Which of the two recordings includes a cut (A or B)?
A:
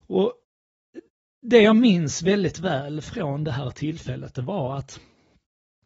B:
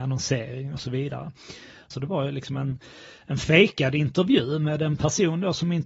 B